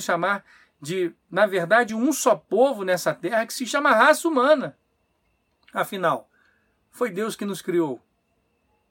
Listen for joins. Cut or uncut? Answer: uncut